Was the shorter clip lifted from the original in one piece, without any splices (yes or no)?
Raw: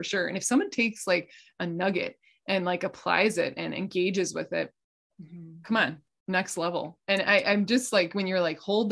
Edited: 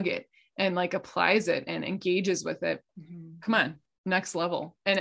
no